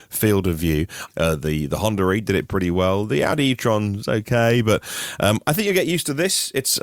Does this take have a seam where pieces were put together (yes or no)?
yes